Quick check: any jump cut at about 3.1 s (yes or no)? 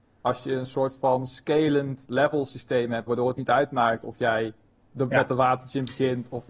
yes